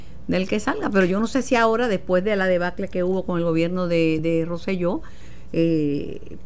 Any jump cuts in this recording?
yes; 1 cut; at 4.2 s

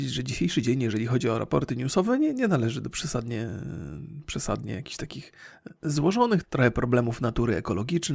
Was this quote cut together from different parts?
yes; 1 cut; at 6.4 s

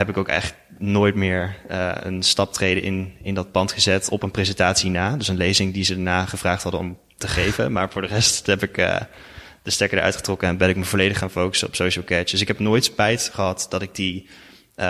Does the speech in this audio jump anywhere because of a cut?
no; 0 cuts

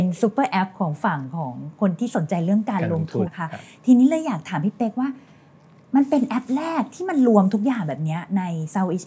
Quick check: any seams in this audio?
yes; 1 cut; at 3.3 s

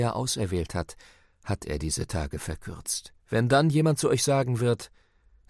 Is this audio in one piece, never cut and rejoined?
no; 1 cut; at 3.2 s

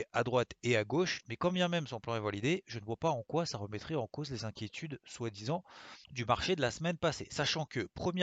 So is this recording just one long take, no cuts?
no; 2 cuts; at 1.2 s, 6.0 s

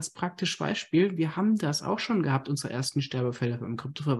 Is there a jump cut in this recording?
no; 0 cuts

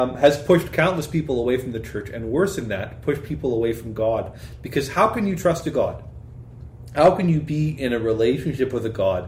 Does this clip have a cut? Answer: no; 0 cuts

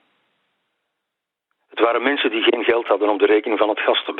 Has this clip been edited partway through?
yes; 1 cut; at 1.6 s

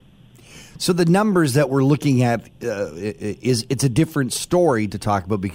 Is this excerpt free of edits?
yes; 0 cuts

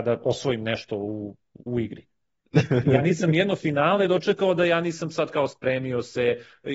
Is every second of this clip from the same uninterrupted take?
yes; 0 cuts

